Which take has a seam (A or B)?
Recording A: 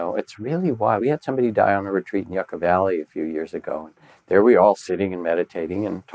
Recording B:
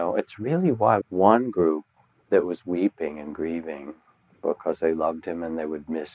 B